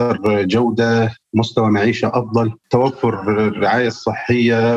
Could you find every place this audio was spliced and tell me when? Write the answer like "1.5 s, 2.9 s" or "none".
2.6 s